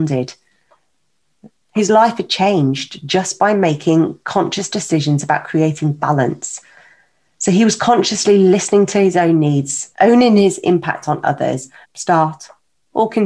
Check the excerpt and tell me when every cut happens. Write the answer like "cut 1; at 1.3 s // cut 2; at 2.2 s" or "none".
cut 1; at 9.9 s // cut 2; at 11.8 s